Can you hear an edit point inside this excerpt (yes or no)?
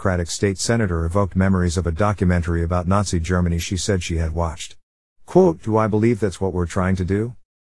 yes